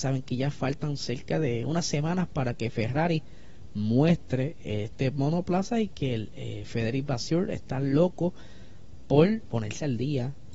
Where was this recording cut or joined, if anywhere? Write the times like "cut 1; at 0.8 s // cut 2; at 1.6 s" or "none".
cut 1; at 9.5 s